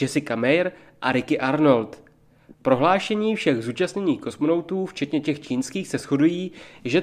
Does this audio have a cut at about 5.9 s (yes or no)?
no